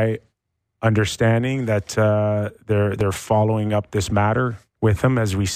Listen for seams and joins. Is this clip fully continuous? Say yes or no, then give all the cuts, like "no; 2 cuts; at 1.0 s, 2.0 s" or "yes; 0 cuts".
yes; 0 cuts